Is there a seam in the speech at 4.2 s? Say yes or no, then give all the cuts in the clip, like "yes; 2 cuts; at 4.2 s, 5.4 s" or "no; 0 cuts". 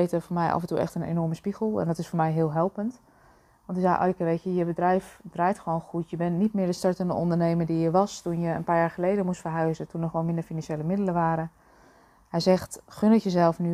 no; 0 cuts